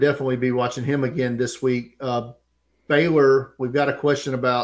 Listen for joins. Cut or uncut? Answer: uncut